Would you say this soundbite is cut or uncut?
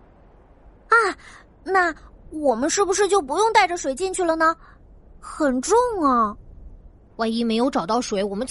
cut